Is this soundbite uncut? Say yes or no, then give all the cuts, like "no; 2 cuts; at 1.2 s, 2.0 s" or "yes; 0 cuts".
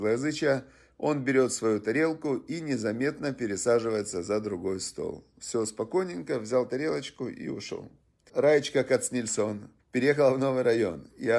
no; 2 cuts; at 8.3 s, 9.8 s